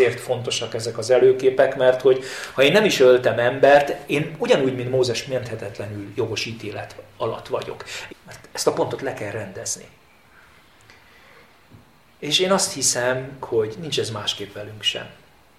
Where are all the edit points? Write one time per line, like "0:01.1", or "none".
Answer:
0:08.1
0:13.4